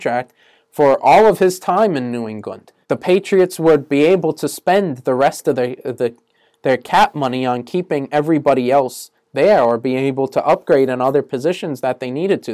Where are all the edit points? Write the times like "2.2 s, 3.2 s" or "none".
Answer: 2.8 s